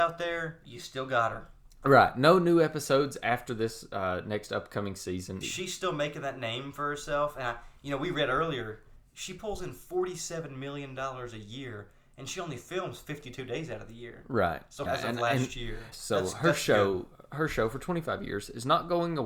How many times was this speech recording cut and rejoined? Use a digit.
3